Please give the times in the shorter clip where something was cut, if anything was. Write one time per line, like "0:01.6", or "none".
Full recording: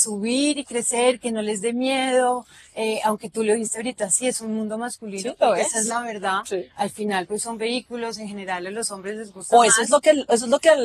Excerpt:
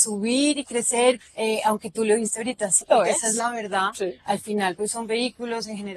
0:01.2
0:02.8